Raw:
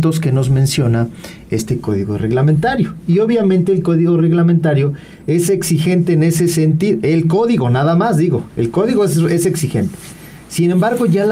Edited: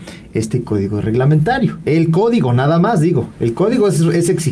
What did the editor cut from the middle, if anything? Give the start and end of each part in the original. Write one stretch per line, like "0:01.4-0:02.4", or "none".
0:03.0-0:07.0